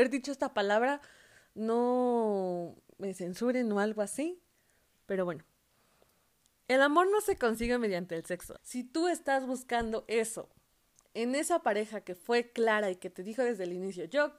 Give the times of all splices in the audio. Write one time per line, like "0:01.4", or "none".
0:08.6